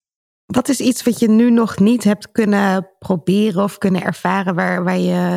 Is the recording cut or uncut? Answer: uncut